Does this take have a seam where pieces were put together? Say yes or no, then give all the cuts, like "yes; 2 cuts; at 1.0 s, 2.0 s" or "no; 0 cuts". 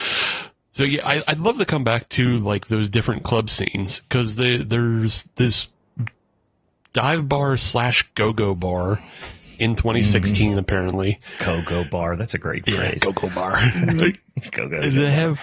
no; 0 cuts